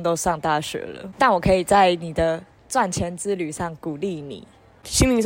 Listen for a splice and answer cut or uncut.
cut